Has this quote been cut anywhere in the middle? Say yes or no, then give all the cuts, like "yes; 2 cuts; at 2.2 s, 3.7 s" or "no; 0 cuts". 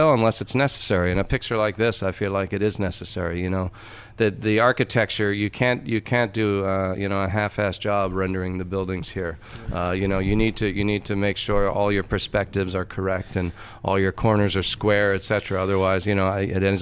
no; 0 cuts